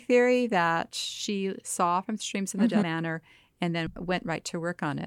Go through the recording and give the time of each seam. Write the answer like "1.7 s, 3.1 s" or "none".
2.8 s